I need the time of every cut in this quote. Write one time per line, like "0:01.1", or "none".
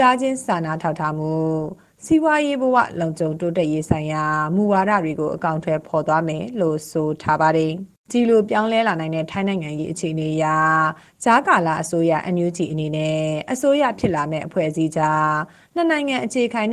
0:08.0